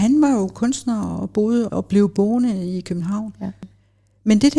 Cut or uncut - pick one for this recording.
cut